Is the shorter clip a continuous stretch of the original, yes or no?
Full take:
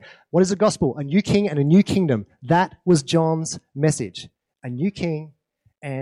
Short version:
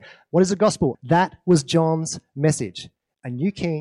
no